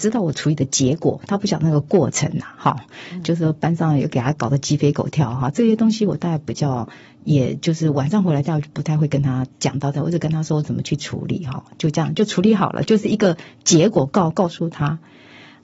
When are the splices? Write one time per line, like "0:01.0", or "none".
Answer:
none

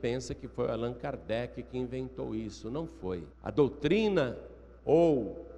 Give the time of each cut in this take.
0:03.3

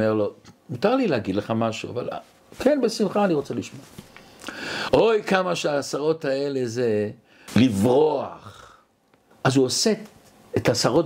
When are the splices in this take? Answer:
0:04.9
0:07.5
0:09.3

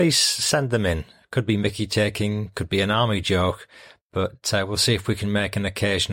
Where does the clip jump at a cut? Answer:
none

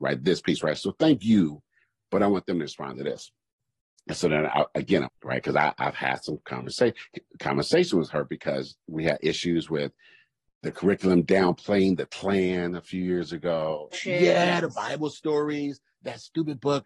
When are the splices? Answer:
0:05.1
0:13.9

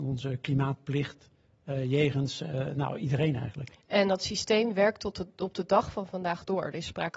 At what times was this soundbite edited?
0:03.8

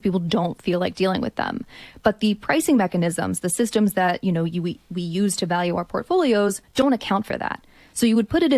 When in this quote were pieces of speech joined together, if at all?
none

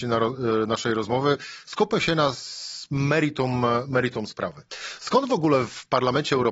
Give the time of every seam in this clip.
none

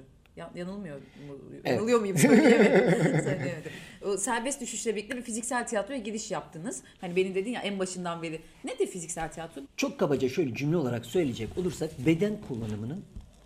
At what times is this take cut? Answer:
0:07.0
0:09.6

